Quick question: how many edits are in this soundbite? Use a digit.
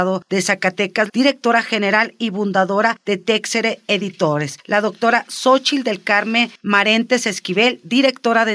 1